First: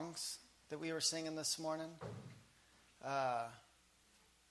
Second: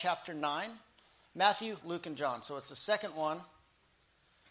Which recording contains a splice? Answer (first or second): second